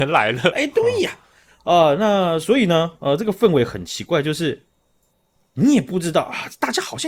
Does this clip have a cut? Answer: no; 0 cuts

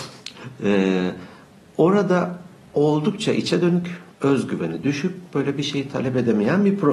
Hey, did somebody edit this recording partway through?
yes; 1 cut; at 4.1 s

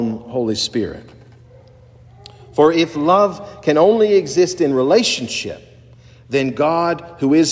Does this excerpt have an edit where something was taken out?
no; 0 cuts

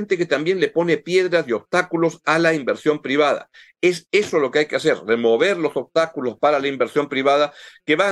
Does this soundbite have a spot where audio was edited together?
no; 0 cuts

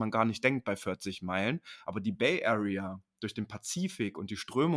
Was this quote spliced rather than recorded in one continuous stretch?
no; 0 cuts

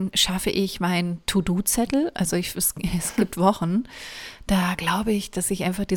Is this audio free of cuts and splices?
yes; 0 cuts

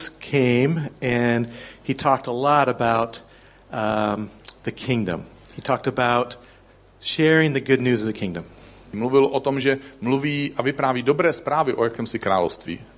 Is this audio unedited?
no; 1 cut; at 8.9 s

